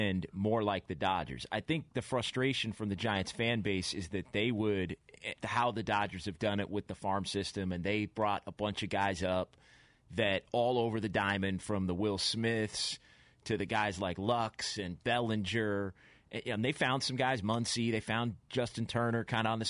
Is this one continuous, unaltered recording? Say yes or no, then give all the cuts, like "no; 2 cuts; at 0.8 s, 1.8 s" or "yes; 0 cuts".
no; 1 cut; at 5.3 s